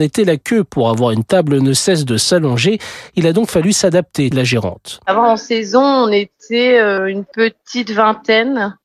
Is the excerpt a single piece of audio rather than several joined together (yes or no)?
no